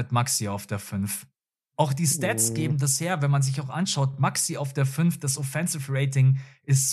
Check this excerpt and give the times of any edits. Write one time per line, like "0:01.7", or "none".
none